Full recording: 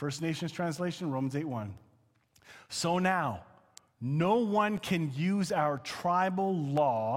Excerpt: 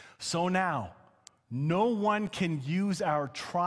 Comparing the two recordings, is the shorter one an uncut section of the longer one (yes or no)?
yes